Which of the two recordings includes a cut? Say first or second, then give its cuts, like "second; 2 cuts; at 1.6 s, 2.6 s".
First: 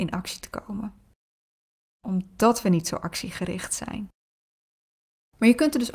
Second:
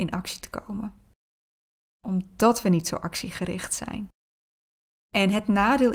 second; 1 cut; at 5.0 s